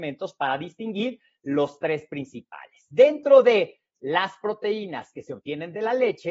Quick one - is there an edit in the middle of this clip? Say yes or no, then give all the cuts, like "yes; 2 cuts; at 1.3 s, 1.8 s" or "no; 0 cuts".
no; 0 cuts